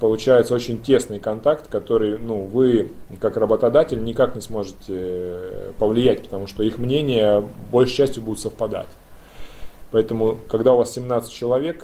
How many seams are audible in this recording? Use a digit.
1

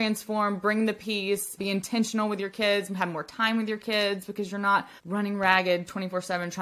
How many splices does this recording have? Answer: 2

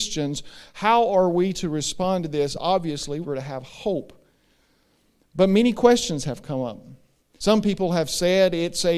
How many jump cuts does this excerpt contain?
2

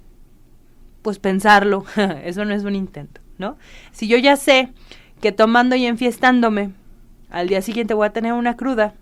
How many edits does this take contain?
1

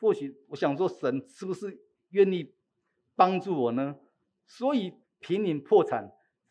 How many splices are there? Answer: 1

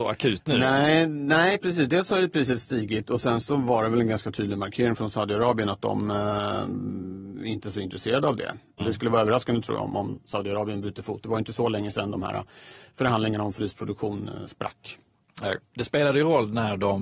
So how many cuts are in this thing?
1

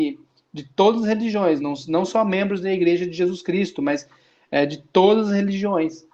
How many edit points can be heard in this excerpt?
0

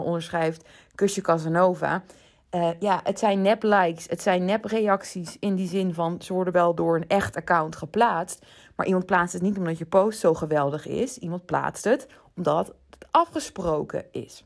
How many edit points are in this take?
0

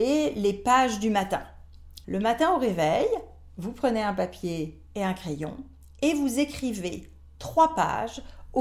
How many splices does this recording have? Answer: 1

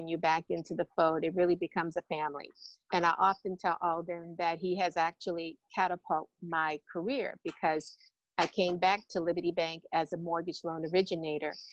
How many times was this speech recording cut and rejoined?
1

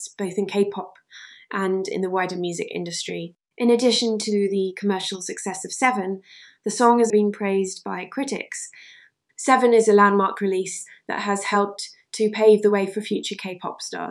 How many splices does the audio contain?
2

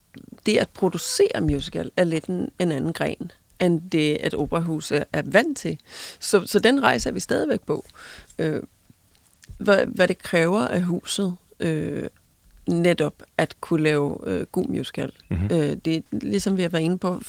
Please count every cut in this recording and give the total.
2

